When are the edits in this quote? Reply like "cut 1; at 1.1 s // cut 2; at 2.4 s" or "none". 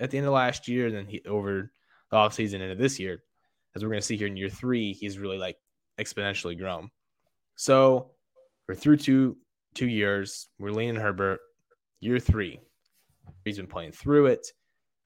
cut 1; at 13.5 s